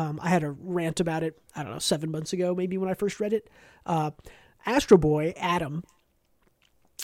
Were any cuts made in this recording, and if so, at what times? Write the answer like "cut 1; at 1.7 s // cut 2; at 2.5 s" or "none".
none